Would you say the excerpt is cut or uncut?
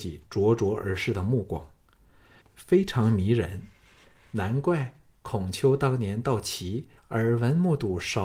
cut